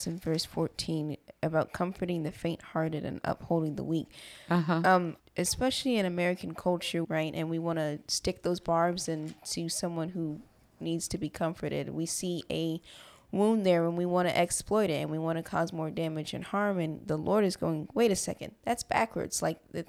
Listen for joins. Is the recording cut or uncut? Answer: cut